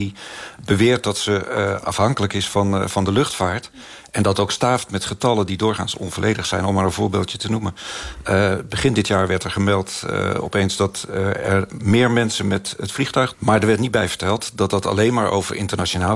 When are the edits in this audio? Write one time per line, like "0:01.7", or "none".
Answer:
0:13.3